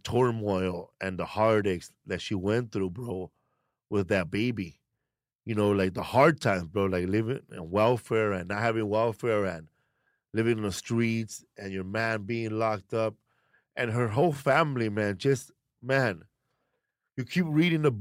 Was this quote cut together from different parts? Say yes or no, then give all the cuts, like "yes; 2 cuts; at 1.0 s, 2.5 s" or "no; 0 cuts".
no; 0 cuts